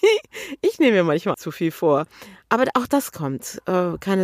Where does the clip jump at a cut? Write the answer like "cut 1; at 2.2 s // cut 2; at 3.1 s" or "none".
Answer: cut 1; at 1.3 s